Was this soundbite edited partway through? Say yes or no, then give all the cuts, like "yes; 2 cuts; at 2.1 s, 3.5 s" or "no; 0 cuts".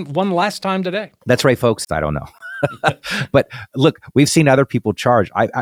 yes; 1 cut; at 1.8 s